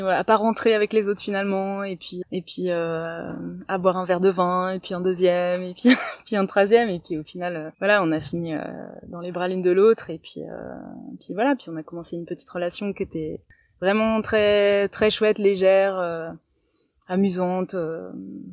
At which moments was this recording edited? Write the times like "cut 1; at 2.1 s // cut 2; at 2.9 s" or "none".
cut 1; at 2.2 s // cut 2; at 7.7 s